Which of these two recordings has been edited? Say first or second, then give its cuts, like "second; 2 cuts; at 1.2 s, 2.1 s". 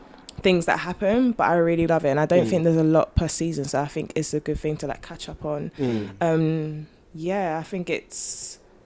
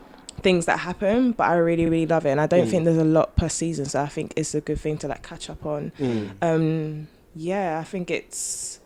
first; 1 cut; at 1.9 s